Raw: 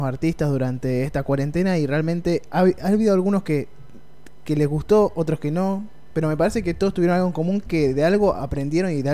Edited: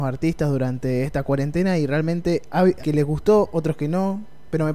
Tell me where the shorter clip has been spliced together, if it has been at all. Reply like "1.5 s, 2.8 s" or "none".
2.8 s

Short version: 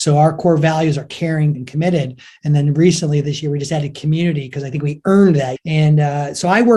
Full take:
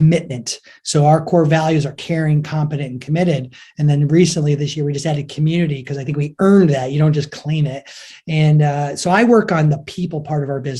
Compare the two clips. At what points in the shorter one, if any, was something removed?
1.5 s, 5.6 s

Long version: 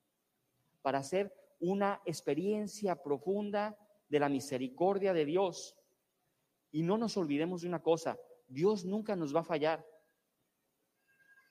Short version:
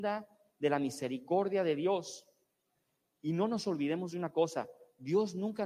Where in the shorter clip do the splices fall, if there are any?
none

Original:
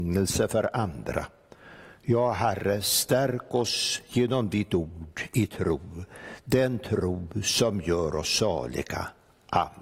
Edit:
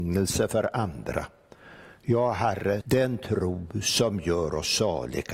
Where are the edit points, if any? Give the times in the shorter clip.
2.8 s

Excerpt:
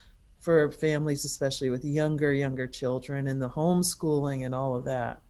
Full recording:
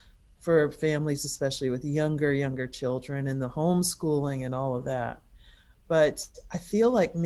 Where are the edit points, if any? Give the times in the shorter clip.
none

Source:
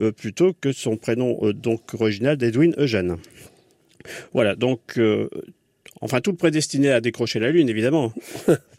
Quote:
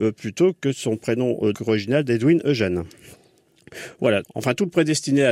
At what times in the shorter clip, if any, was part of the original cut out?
1.5 s, 4.2 s

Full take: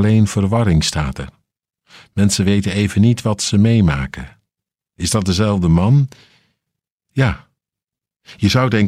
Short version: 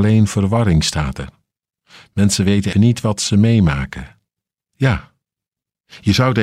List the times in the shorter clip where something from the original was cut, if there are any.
2.7 s, 4.6 s

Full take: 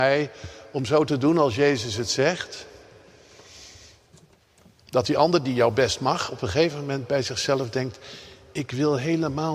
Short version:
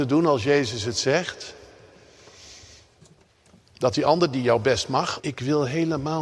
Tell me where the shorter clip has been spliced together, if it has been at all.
5.2 s

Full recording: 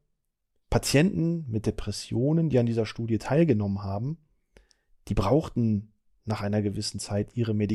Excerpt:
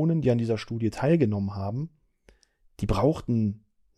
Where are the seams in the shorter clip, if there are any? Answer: none

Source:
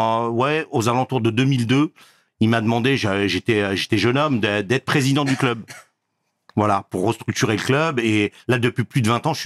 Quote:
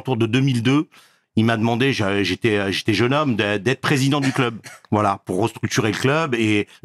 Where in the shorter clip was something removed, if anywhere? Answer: 4.8 s

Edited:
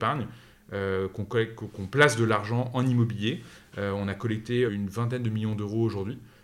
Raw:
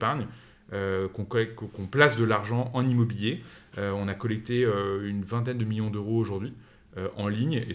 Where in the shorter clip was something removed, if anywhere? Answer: 4.7 s

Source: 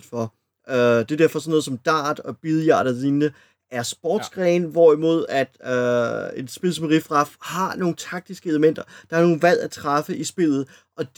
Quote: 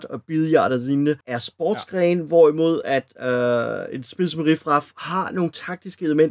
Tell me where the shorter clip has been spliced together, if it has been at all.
1.2 s

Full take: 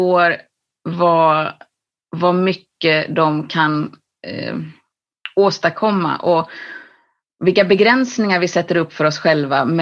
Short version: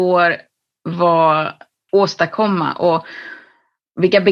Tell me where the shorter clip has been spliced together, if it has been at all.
1.9 s

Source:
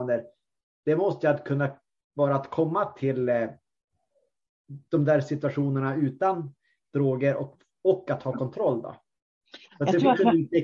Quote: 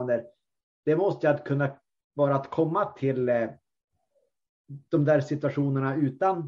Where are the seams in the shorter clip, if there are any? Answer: none

